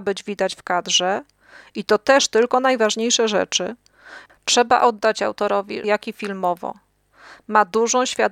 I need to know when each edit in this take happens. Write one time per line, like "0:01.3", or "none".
0:04.3
0:05.8